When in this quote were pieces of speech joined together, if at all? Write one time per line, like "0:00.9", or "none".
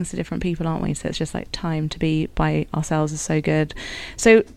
none